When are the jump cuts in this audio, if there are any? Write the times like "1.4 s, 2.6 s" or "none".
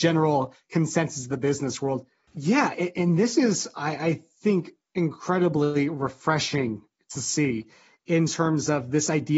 2.3 s